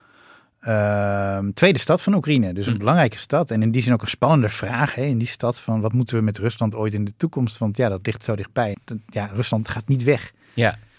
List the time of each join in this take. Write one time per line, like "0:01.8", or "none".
0:08.7